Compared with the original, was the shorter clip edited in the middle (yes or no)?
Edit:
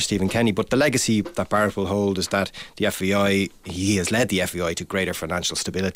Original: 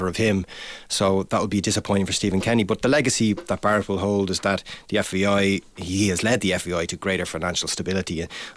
no